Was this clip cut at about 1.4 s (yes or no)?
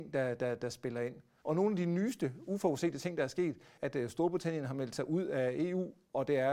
yes